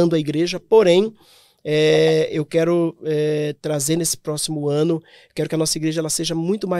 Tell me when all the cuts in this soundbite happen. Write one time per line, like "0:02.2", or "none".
none